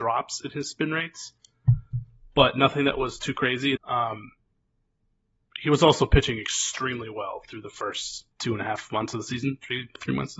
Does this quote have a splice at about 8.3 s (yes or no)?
yes